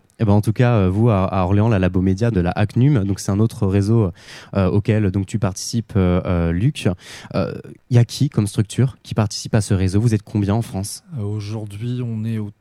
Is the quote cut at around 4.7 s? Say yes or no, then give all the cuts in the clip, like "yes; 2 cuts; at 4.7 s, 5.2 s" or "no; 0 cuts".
no; 2 cuts; at 2.3 s, 7.8 s